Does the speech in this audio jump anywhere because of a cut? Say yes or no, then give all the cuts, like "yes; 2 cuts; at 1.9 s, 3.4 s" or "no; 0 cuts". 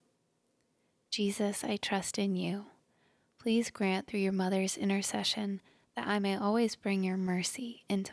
no; 0 cuts